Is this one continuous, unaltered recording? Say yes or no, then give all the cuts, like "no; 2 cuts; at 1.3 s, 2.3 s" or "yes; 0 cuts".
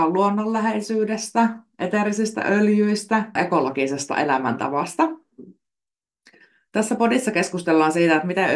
no; 1 cut; at 3.4 s